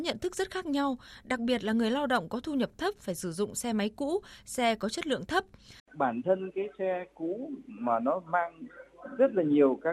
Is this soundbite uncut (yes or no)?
no